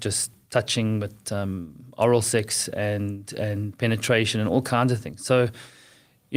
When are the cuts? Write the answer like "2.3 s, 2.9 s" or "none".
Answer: none